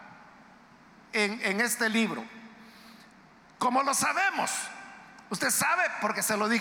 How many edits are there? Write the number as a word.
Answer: zero